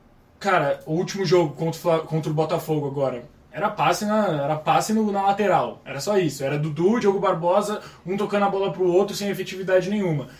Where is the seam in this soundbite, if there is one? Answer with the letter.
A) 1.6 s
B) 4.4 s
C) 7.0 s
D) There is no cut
D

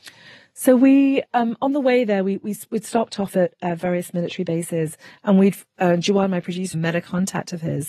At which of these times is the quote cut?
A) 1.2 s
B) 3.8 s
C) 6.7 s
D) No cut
C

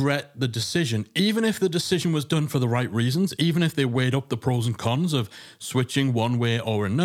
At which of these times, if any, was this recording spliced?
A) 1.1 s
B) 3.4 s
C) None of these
C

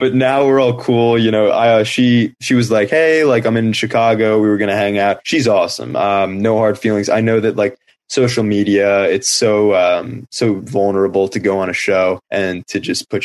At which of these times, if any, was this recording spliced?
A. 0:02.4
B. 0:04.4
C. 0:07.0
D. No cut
D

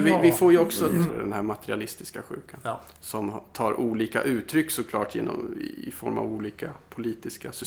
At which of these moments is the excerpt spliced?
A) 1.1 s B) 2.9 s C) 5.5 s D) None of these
A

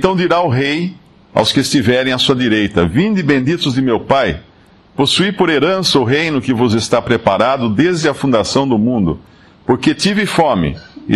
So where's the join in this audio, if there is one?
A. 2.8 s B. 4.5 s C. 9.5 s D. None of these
D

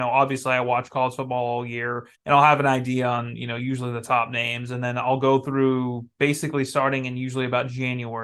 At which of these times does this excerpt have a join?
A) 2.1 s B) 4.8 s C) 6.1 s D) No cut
A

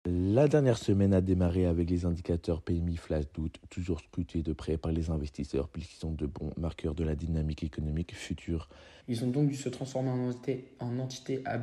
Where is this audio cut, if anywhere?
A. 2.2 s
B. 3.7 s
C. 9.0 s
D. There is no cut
C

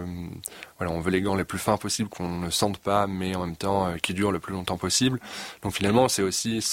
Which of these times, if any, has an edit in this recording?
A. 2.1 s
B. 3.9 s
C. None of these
A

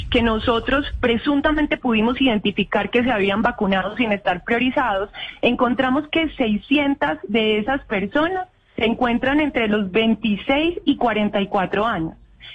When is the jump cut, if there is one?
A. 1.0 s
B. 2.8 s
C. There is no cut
A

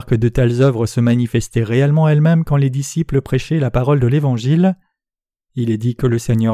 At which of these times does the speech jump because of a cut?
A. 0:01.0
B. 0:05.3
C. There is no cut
C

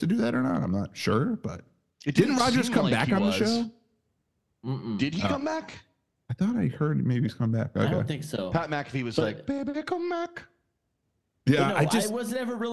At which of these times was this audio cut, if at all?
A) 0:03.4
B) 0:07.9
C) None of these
C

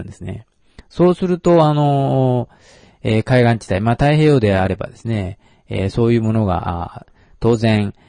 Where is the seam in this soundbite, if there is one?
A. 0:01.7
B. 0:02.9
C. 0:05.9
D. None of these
D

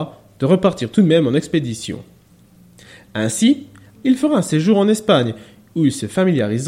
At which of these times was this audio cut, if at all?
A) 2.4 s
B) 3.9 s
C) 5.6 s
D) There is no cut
B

